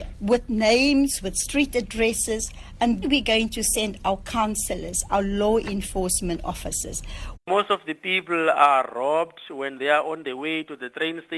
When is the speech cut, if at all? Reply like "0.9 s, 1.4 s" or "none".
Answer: 3.0 s, 7.3 s